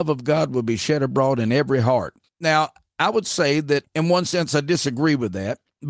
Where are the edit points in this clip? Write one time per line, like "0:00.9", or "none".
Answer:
0:02.3